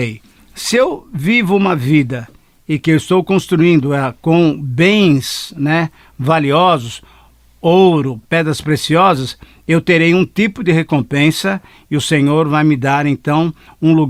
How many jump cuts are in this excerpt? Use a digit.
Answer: 1